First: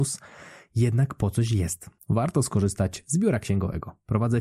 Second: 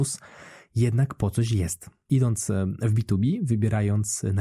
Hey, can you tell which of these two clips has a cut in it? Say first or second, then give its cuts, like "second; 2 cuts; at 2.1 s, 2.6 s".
first; 1 cut; at 2.0 s